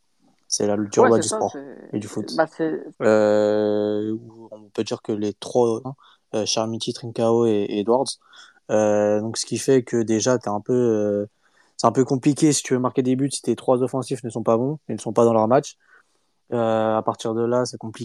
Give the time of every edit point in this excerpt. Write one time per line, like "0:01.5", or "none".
0:02.9
0:05.8